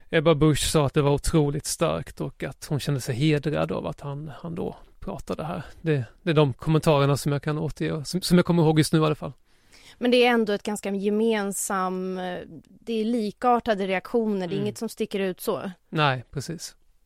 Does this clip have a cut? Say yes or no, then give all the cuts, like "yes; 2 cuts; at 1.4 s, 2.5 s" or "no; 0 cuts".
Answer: no; 0 cuts